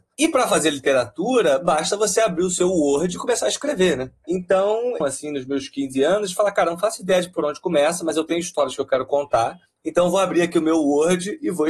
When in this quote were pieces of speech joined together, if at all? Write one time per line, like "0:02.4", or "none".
0:05.0